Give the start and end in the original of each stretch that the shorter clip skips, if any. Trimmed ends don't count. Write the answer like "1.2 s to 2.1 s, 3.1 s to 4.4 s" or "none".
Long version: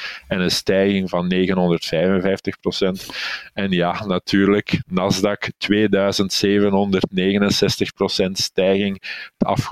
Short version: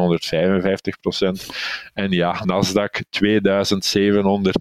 4.0 s to 4.9 s